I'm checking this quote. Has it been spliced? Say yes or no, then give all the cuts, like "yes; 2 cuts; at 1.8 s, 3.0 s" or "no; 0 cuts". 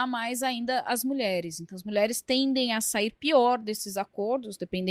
no; 0 cuts